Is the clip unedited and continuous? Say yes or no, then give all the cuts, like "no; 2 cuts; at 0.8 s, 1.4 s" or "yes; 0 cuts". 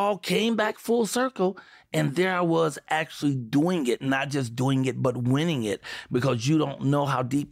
yes; 0 cuts